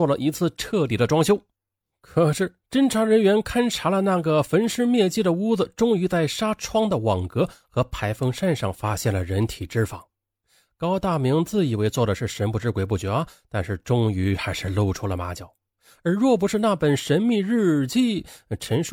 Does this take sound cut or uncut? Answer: uncut